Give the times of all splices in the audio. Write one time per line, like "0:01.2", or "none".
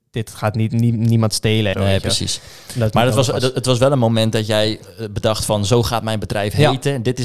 0:01.7

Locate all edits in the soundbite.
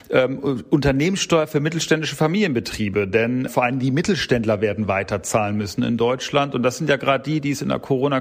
0:03.5

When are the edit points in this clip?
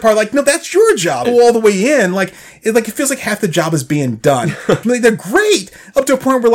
0:01.2
0:04.8

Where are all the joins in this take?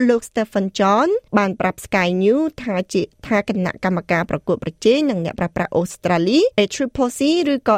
0:01.3
0:06.5

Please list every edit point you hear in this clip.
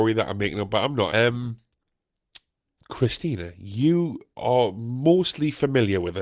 0:01.1
0:02.8

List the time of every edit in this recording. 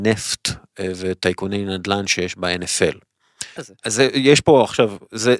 0:03.6

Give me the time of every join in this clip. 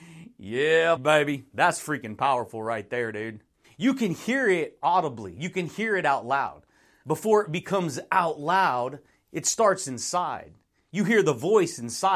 0:01.0
0:03.6
0:07.0

